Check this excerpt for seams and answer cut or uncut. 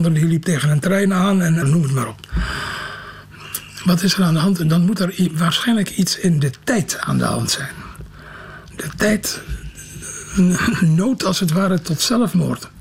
cut